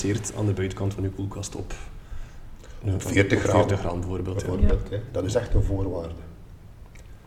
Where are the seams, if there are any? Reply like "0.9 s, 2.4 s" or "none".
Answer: 5.1 s